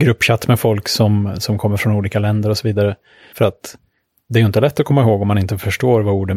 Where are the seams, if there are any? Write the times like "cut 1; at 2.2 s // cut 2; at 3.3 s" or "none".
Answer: cut 1; at 3.3 s